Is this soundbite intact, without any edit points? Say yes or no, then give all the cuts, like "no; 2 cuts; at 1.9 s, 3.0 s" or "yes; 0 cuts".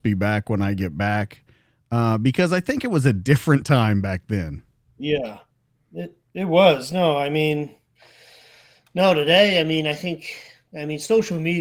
yes; 0 cuts